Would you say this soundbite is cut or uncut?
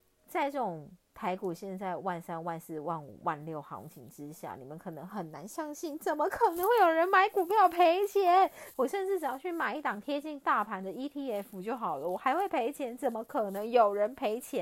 cut